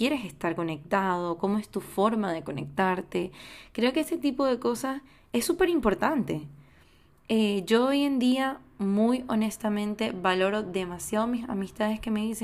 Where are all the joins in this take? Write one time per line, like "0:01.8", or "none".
none